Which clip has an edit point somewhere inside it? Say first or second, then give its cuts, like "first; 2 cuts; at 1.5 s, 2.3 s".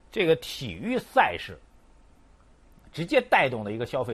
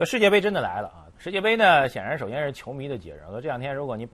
second; 1 cut; at 1.1 s